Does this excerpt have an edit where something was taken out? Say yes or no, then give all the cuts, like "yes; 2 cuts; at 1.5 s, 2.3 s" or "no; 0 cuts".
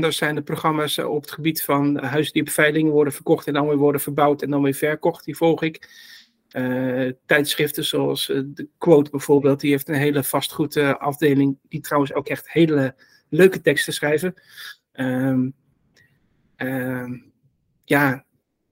no; 0 cuts